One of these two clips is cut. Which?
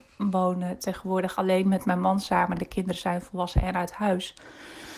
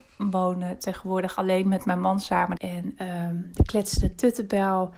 second; 1 cut; at 2.6 s

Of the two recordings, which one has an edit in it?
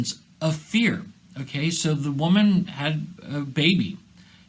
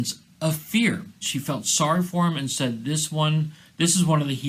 second; 1 cut; at 1.2 s

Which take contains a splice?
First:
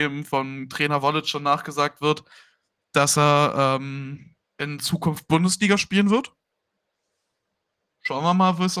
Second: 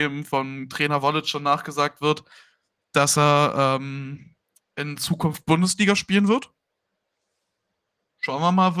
first; 1 cut; at 4.5 s

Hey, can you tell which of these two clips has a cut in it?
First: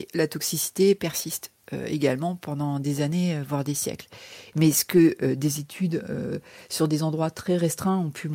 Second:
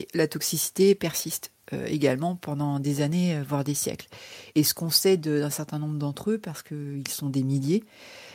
first; 1 cut; at 4.5 s

